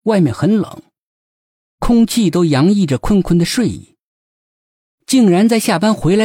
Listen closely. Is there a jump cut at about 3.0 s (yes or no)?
no